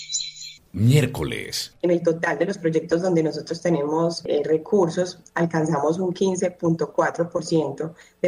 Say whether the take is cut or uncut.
uncut